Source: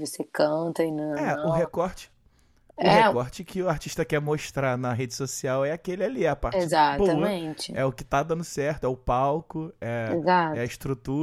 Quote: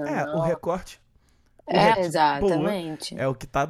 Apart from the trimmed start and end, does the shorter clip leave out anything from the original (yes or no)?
yes